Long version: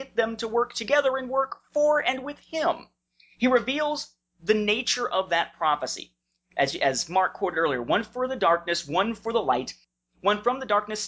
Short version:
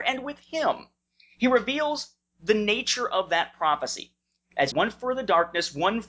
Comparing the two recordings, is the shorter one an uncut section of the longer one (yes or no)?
no